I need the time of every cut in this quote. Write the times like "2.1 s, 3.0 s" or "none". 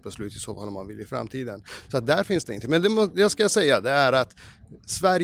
none